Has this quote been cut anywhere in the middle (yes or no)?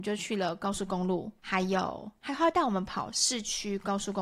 yes